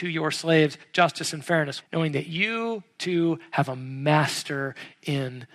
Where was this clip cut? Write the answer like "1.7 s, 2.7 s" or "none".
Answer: 1.8 s